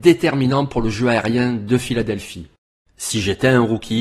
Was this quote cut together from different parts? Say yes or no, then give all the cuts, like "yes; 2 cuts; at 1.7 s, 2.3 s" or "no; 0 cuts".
yes; 1 cut; at 2.9 s